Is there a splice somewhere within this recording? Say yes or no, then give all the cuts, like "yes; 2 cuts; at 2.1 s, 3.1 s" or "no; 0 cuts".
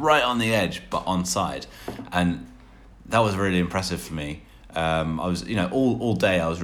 no; 0 cuts